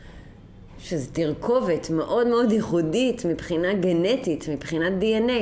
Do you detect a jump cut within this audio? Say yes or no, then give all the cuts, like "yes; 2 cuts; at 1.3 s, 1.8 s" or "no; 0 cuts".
no; 0 cuts